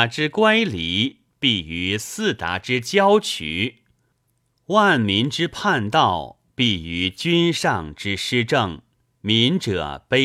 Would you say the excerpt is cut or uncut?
cut